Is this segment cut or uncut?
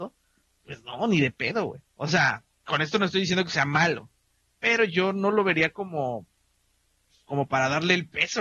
uncut